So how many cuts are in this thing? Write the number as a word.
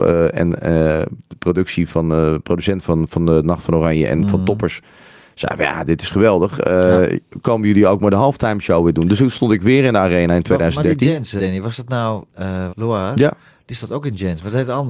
two